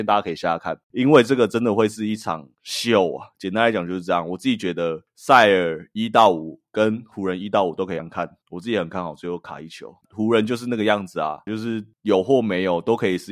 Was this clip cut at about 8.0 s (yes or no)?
yes